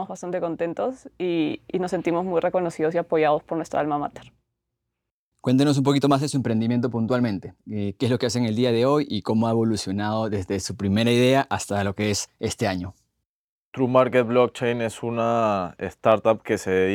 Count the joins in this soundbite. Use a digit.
0